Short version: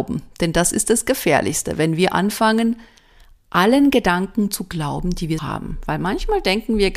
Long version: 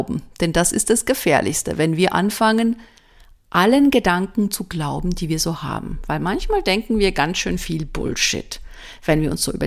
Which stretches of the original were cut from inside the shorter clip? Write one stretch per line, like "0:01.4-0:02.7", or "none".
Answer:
0:05.4-0:05.6